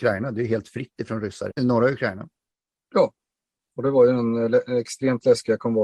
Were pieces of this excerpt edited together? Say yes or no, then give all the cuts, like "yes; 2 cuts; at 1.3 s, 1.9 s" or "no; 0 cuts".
yes; 1 cut; at 1.5 s